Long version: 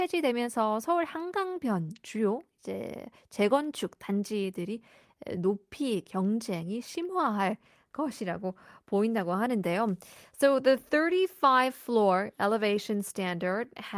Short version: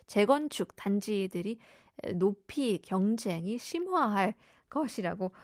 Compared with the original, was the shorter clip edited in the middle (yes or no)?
no